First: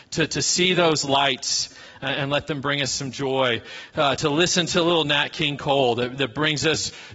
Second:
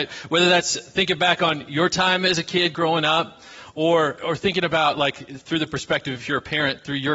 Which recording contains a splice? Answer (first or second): second